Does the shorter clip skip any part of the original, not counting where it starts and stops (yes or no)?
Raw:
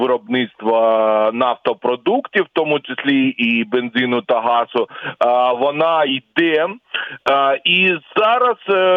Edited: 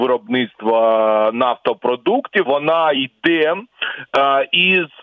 yes